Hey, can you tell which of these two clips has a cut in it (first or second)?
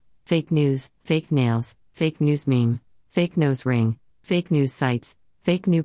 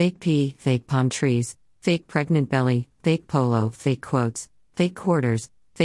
first